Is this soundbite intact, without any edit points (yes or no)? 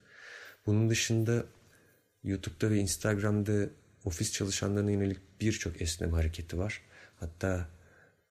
no